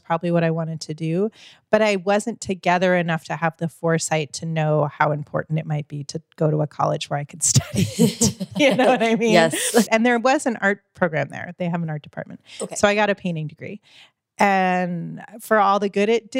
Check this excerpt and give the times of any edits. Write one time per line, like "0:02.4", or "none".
0:09.9